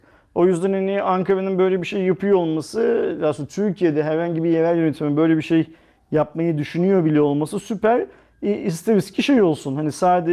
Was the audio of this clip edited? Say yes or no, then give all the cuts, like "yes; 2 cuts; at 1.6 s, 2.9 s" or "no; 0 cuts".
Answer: no; 0 cuts